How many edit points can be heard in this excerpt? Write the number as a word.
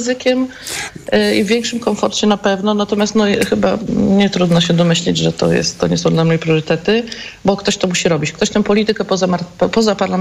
zero